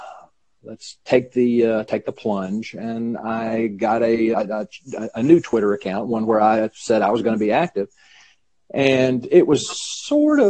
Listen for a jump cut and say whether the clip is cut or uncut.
cut